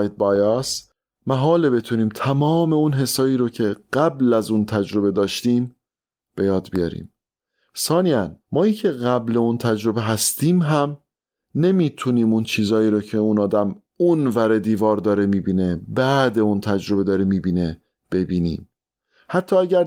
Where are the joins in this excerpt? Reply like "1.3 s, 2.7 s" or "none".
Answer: 8.4 s